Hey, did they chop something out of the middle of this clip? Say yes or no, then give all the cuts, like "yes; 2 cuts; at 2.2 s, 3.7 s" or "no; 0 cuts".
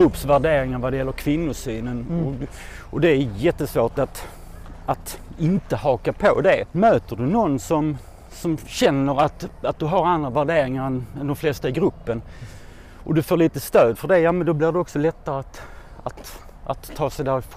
yes; 1 cut; at 6.7 s